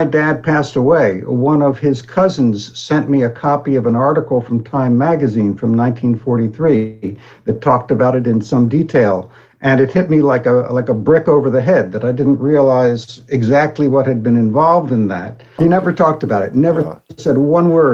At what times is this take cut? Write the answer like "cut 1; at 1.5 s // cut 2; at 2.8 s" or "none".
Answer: cut 1; at 15.6 s